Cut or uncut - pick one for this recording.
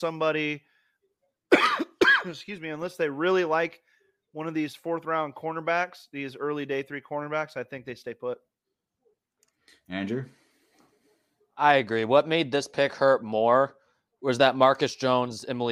uncut